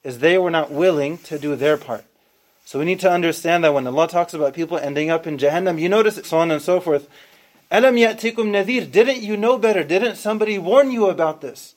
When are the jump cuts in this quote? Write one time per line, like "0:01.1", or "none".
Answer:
0:06.2